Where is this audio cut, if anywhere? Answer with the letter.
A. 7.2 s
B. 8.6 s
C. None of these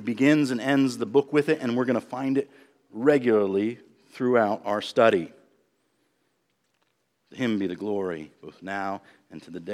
A